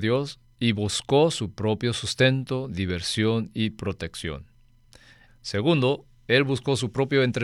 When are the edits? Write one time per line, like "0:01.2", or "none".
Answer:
0:05.3